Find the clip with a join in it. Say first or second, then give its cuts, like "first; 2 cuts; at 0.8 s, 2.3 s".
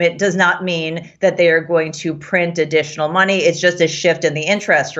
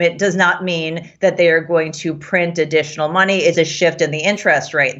second; 1 cut; at 3.5 s